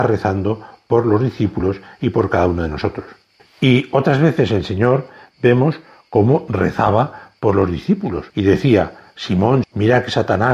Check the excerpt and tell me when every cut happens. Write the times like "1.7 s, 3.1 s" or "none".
3.4 s, 8.3 s, 9.6 s

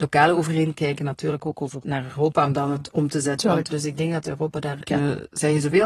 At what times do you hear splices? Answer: 3.7 s, 4.8 s

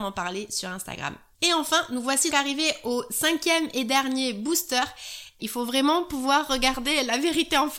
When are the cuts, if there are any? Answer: 2.3 s, 5.4 s

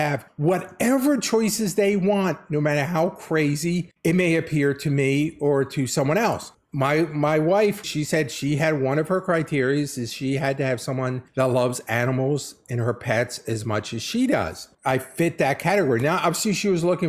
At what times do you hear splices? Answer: 7.8 s

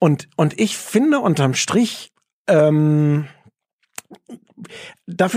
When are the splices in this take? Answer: none

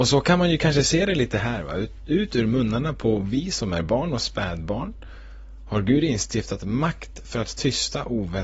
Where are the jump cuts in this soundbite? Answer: none

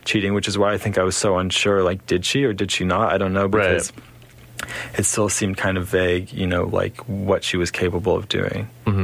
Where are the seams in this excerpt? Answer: none

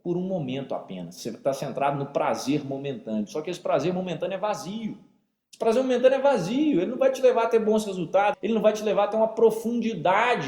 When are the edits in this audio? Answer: 8.3 s

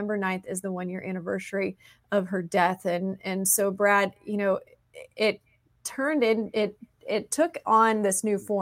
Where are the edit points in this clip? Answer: none

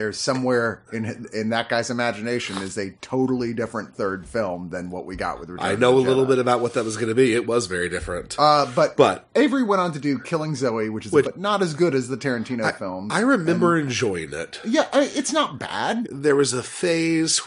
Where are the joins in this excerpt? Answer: 11.2 s, 16.0 s

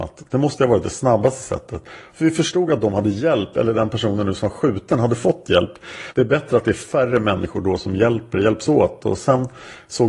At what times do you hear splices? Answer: 2.1 s, 6.1 s

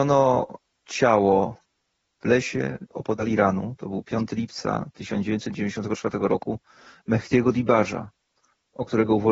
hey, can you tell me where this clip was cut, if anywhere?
none

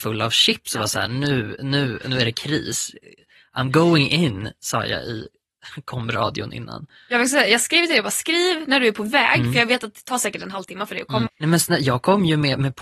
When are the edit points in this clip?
11.3 s

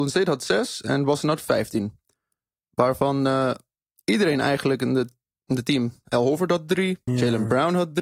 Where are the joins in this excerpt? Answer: 7.1 s

